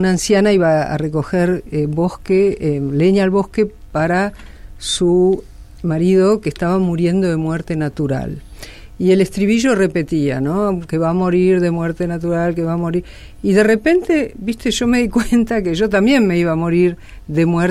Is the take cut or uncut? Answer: uncut